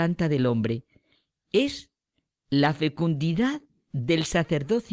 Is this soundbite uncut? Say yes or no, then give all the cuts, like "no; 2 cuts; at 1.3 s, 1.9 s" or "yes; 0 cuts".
yes; 0 cuts